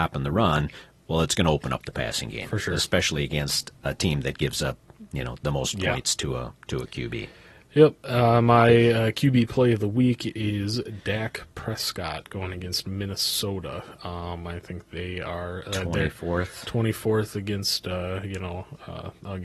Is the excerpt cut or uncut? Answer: uncut